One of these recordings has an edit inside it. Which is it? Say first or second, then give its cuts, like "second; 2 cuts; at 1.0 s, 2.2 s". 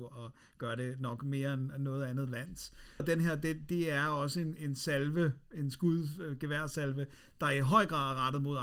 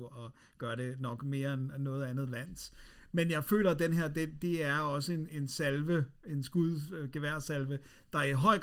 first; 1 cut; at 3.0 s